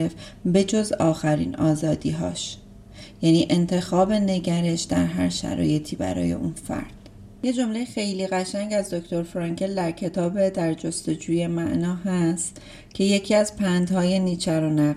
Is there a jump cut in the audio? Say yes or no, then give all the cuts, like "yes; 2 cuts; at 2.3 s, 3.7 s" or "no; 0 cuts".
no; 0 cuts